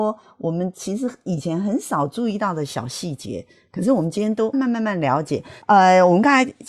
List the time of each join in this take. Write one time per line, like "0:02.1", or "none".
0:04.5

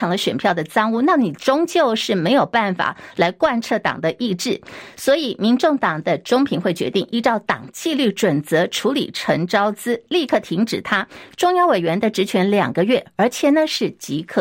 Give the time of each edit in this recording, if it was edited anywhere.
none

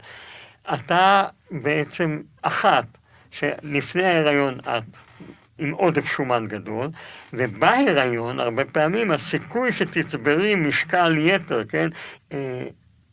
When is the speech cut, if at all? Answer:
0:02.4
0:12.2

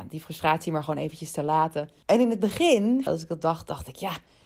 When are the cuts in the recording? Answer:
0:02.0
0:03.1

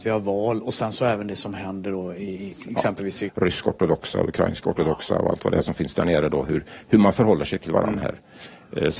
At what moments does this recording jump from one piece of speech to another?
0:03.3

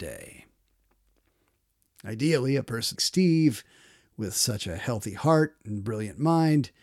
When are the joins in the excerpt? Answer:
0:01.9
0:03.0

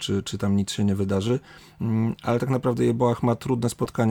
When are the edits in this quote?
none

